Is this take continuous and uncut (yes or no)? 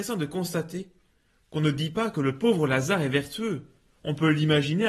yes